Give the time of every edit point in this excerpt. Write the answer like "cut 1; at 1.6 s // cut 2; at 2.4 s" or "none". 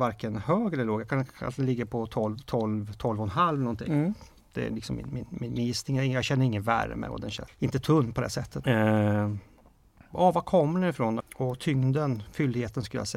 cut 1; at 7.5 s // cut 2; at 8.6 s // cut 3; at 11.2 s